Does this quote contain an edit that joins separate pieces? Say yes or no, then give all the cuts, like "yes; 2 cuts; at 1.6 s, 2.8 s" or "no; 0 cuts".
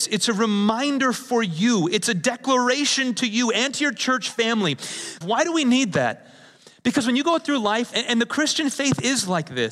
yes; 2 cuts; at 5.2 s, 7.9 s